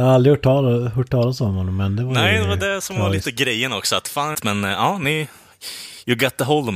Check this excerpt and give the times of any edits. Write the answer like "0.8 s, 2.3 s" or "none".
4.3 s